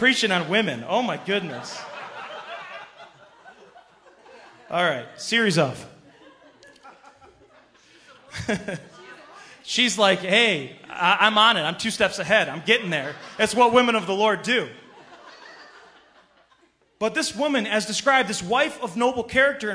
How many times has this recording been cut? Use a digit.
0